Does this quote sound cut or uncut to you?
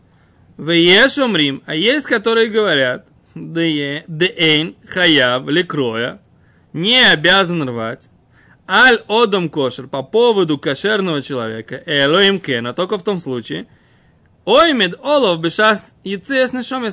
uncut